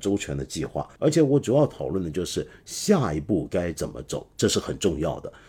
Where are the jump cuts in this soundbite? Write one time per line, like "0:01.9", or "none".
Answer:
0:01.0